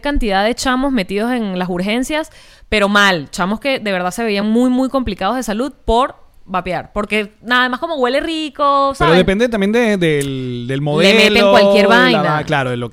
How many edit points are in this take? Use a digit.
0